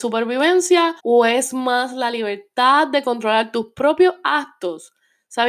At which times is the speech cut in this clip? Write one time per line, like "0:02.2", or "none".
0:01.0